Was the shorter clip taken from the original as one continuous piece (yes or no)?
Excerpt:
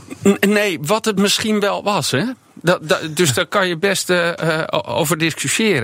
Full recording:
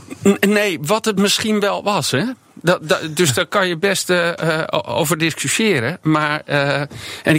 yes